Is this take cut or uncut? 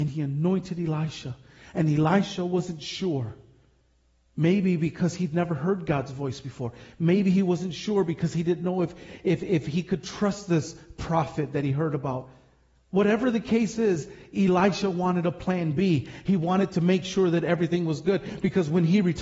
uncut